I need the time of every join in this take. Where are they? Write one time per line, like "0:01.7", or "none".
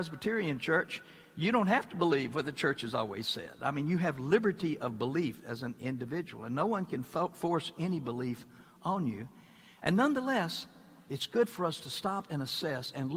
none